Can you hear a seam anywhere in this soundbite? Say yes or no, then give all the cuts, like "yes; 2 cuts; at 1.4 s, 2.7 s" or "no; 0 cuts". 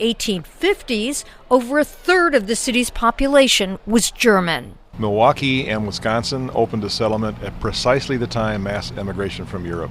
yes; 1 cut; at 4.9 s